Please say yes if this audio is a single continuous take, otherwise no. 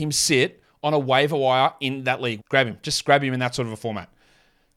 no